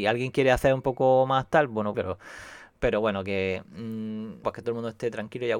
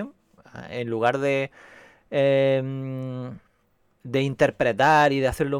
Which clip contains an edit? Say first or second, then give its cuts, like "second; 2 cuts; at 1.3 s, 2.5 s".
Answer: first; 2 cuts; at 1.9 s, 4.4 s